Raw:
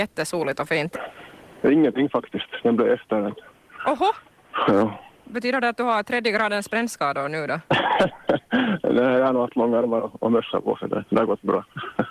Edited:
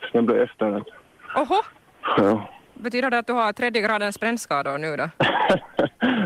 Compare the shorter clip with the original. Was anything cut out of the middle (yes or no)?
no